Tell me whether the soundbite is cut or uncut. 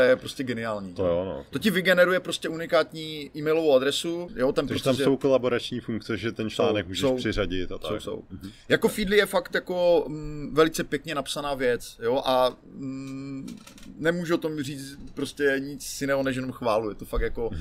cut